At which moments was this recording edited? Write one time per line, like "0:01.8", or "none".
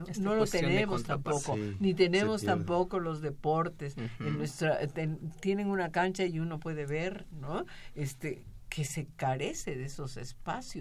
none